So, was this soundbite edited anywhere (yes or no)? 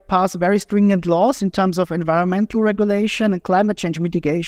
no